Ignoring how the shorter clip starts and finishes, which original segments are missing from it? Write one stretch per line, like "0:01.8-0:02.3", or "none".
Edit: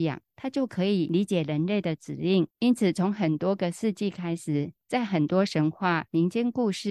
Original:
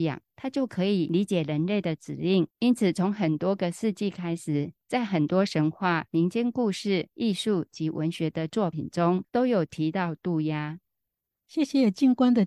none